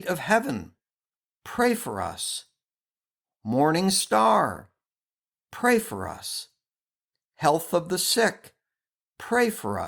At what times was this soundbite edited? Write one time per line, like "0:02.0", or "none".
none